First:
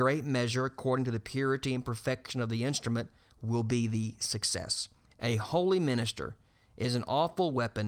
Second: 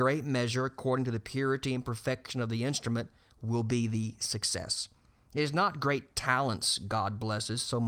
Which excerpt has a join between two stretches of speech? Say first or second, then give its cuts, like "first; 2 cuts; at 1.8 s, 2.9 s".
first; 1 cut; at 5.1 s